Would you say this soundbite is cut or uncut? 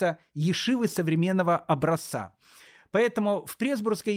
uncut